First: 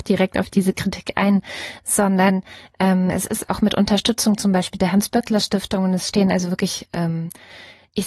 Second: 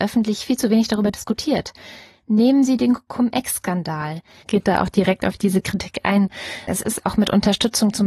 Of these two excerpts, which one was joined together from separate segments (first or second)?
second